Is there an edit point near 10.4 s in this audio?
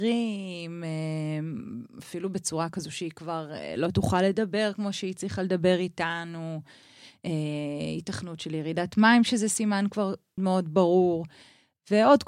yes; 1 cut; at 10.4 s

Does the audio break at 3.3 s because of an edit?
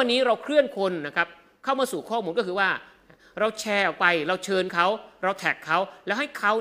no; 0 cuts

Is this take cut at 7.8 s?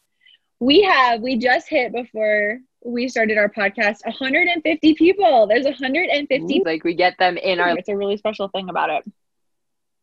yes; 2 cuts; at 6.6 s, 7.8 s

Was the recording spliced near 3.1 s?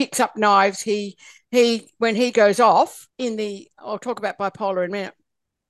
yes; 1 cut; at 3.1 s

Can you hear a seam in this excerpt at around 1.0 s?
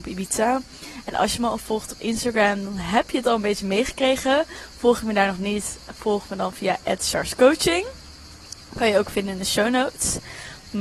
no; 0 cuts

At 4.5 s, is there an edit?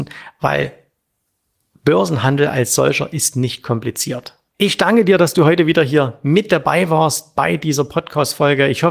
yes; 1 cut; at 4.5 s

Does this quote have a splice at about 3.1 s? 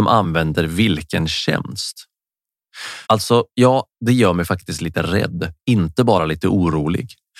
yes; 1 cut; at 3.1 s

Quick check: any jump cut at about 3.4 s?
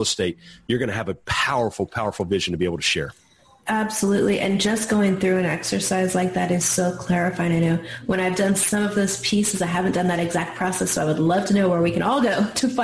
no; 0 cuts

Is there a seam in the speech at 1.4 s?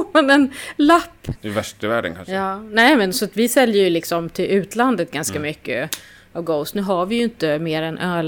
yes; 1 cut; at 1.4 s

